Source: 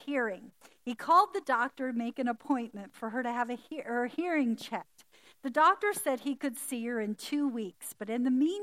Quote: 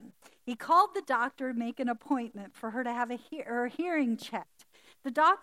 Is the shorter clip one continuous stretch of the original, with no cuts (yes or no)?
yes